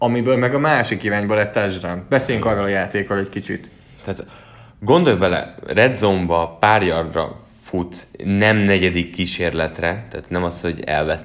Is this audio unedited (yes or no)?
yes